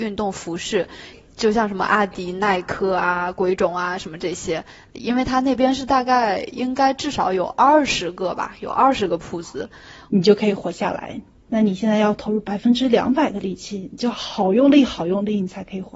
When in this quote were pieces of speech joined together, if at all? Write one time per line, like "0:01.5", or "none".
0:10.1